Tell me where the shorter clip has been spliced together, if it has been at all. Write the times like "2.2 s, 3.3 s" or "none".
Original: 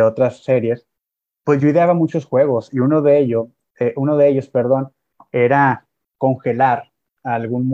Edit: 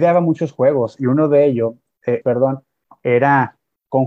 2.2 s